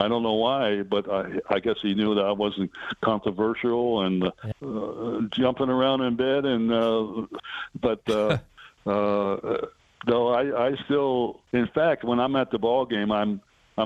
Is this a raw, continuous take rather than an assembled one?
no; 3 cuts; at 4.5 s, 7.4 s, 11.5 s

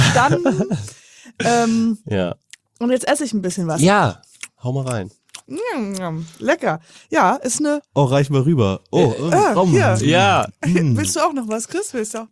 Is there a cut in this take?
yes; 1 cut; at 5.4 s

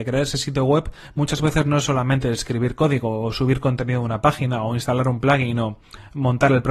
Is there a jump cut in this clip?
no; 0 cuts

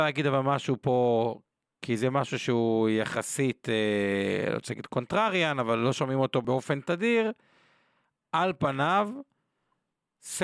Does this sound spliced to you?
no; 0 cuts

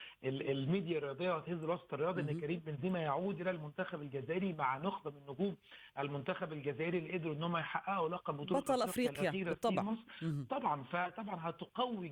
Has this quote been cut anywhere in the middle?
no; 0 cuts

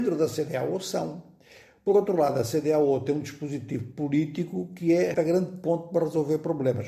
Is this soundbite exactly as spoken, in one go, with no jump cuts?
no; 1 cut; at 5.1 s

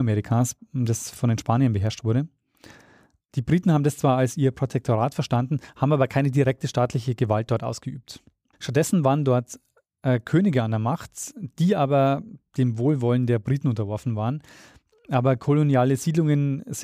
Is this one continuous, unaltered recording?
no; 1 cut; at 8.5 s

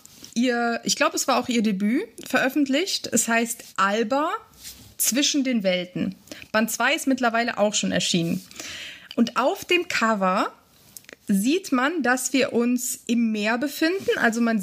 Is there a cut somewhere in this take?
no; 0 cuts

